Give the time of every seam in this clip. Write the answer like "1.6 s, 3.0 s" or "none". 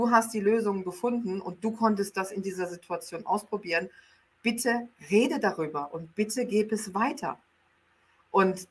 none